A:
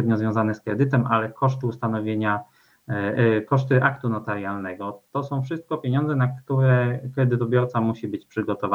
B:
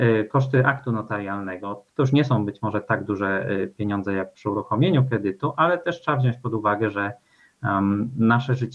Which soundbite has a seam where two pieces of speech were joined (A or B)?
B